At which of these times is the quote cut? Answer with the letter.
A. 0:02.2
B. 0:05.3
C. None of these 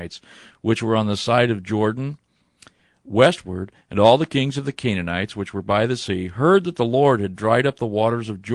C